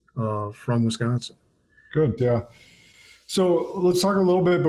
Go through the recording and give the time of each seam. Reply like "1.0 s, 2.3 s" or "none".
2.2 s